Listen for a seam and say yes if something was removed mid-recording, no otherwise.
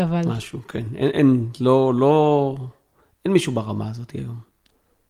no